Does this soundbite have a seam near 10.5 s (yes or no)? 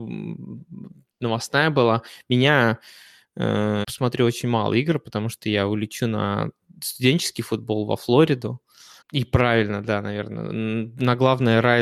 no